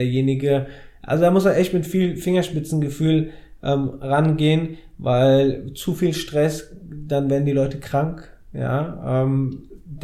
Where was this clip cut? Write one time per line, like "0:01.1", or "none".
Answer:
none